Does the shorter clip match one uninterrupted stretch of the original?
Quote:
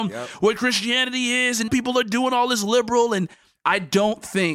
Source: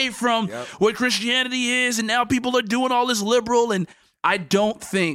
no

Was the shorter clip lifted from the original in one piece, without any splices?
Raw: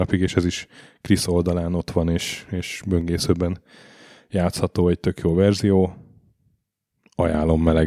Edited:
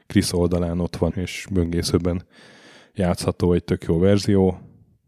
no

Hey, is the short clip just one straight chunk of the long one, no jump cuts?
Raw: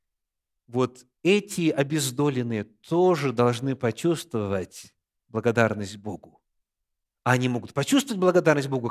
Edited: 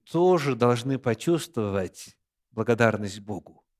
yes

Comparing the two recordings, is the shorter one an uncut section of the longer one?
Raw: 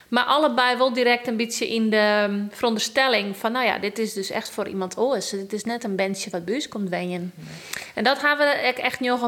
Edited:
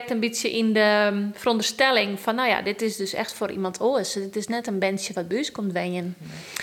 yes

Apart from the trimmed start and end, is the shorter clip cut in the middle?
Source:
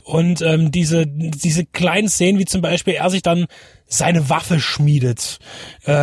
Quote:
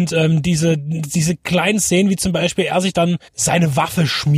yes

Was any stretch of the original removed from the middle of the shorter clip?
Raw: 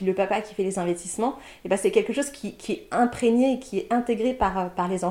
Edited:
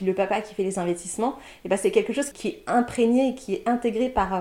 yes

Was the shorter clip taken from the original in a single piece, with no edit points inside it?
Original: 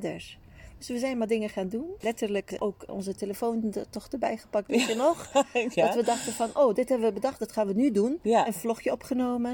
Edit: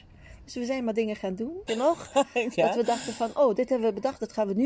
no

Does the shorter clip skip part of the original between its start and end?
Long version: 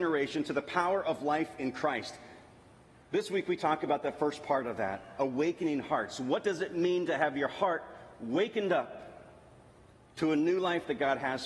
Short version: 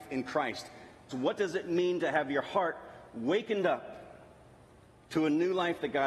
yes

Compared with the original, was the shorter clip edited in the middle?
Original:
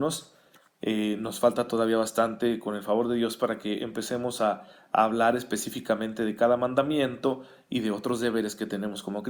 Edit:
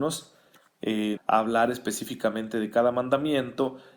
yes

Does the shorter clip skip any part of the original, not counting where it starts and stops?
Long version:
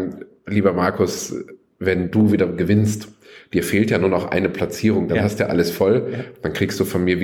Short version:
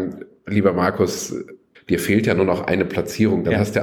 yes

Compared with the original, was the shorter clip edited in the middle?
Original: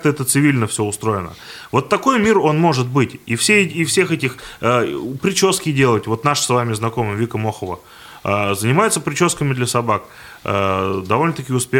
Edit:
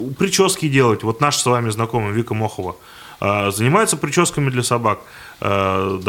no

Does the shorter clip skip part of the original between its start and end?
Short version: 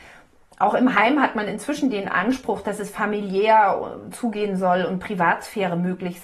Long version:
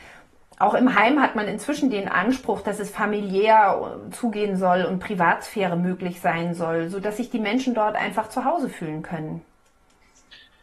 no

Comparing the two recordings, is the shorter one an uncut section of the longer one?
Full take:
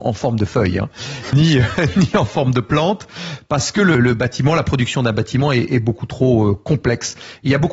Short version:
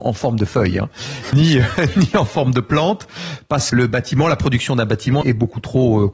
no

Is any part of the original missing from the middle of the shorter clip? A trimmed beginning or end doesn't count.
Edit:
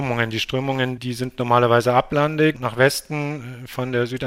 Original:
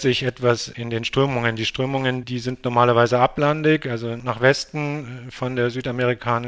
yes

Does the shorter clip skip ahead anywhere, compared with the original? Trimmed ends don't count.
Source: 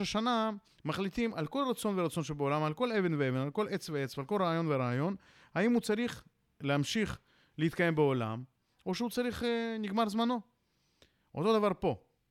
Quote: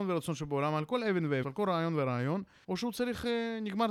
yes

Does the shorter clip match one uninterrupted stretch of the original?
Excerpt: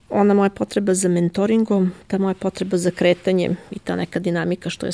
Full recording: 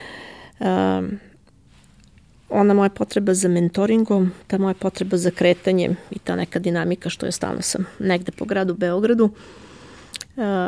yes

